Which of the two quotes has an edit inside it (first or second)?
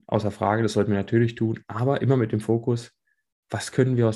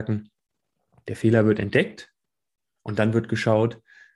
second